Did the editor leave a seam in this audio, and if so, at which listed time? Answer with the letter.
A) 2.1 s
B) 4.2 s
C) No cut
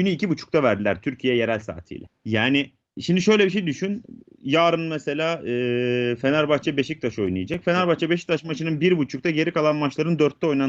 A